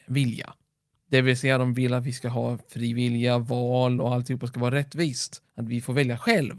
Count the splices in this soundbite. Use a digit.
0